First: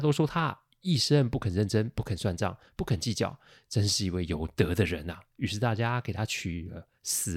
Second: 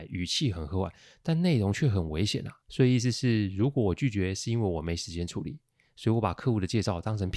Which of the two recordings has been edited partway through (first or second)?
second